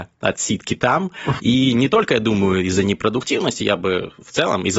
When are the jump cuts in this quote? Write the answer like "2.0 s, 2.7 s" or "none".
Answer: 1.4 s